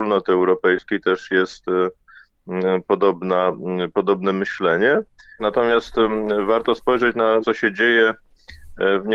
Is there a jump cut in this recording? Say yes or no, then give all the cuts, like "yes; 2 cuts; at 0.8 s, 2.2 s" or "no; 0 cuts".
yes; 2 cuts; at 5.4 s, 7.4 s